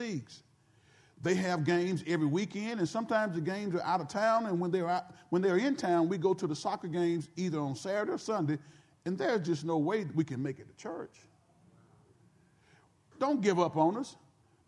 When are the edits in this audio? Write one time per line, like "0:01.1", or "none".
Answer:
0:13.1